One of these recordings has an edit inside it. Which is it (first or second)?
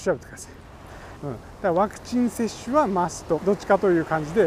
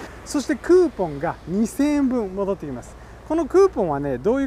first